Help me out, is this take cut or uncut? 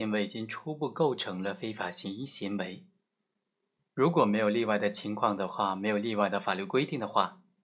uncut